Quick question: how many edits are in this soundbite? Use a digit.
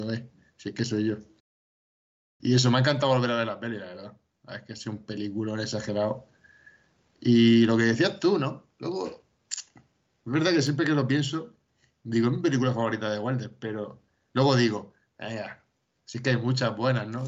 0